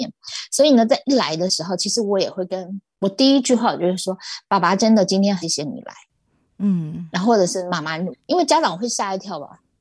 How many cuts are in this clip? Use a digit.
2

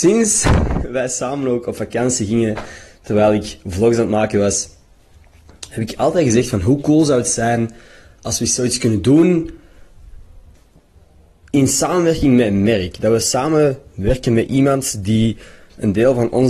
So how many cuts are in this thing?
0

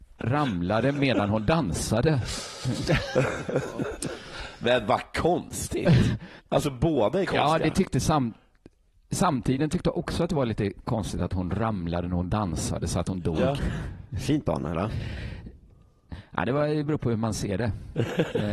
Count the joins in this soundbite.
2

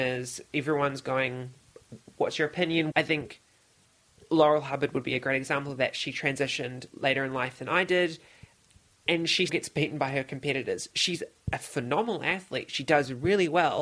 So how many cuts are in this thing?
2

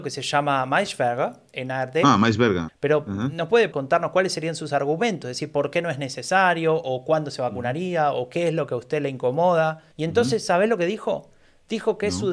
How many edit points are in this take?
3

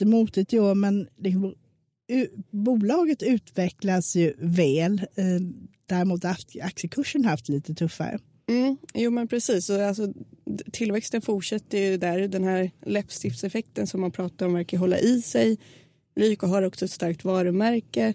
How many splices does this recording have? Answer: 0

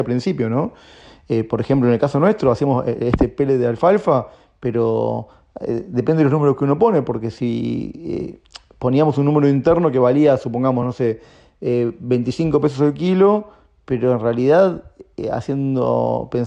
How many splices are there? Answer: 0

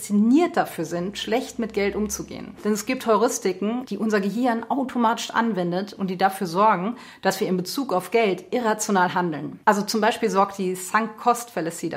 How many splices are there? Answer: 1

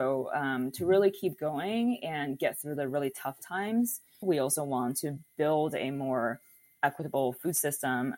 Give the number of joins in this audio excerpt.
1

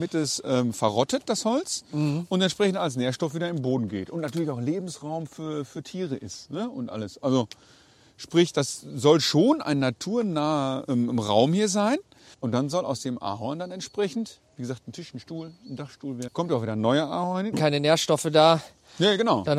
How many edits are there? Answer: 3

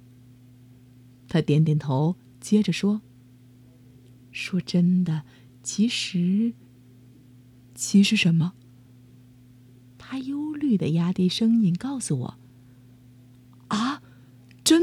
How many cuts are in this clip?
1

